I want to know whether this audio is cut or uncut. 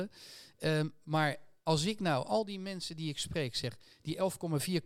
uncut